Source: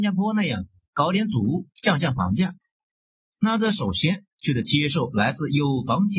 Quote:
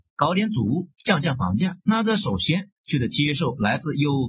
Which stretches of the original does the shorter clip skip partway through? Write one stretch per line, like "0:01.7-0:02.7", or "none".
0:02.6-0:03.4